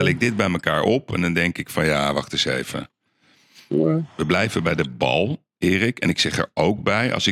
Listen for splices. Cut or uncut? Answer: uncut